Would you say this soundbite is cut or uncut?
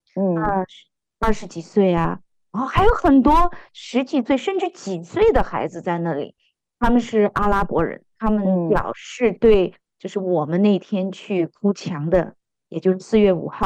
uncut